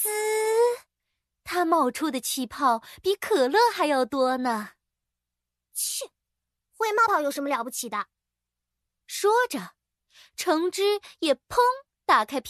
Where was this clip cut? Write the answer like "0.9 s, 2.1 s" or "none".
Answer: 7.1 s